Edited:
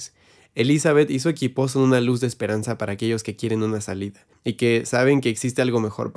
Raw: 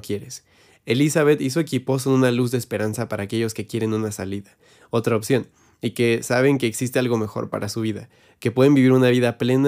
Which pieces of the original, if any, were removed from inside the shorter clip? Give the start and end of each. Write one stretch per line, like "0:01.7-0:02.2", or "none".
0:04.6-0:05.7